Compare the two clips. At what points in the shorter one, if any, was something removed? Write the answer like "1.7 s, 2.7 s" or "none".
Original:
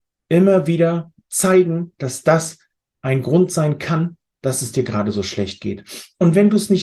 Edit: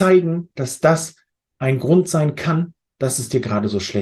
none